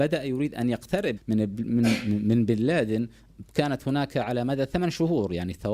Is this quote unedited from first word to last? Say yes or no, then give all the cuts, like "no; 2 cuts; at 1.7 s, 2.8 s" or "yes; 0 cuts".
no; 1 cut; at 1.2 s